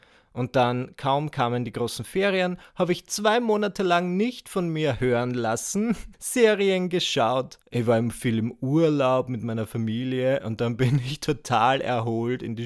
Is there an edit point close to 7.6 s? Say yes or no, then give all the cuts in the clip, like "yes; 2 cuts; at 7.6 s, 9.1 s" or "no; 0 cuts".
yes; 2 cuts; at 6.1 s, 7.6 s